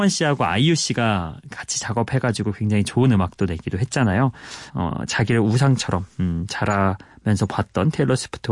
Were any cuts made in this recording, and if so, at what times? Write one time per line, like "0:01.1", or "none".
0:04.7